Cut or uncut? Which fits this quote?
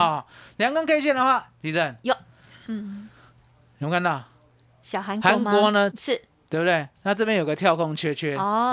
cut